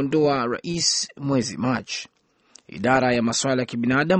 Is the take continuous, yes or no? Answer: yes